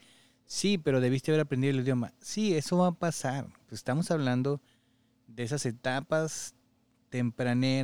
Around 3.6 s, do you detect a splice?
no; 0 cuts

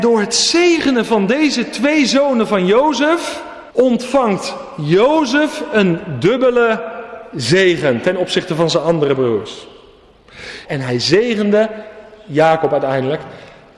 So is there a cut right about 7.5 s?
no; 2 cuts; at 3.7 s, 10.6 s

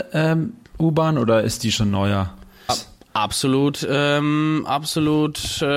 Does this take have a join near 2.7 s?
yes; 1 cut; at 2.7 s

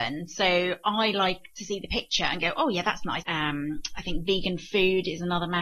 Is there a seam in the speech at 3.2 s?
yes; 1 cut; at 3.2 s

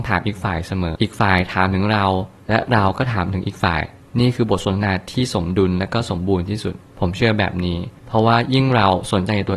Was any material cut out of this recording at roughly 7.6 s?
no; 1 cut; at 0.9 s

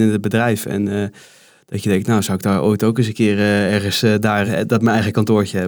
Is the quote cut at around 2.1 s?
no; 1 cut; at 4.5 s

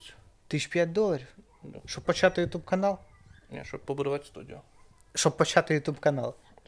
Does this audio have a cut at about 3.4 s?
no; 1 cut; at 2.0 s

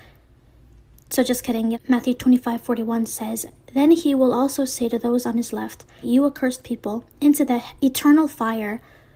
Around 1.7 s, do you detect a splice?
yes; 2 cuts; at 1.7 s, 6.0 s

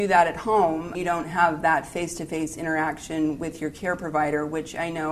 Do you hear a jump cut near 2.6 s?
no; 1 cut; at 0.9 s

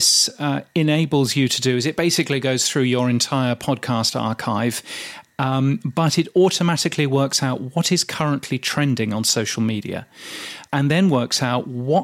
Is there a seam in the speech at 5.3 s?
no; 0 cuts

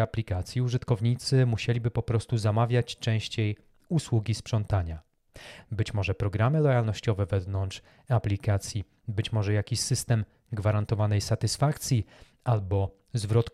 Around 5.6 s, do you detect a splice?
yes; 1 cut; at 5.6 s

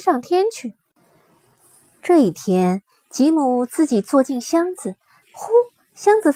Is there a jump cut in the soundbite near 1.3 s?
no; 1 cut; at 5.2 s

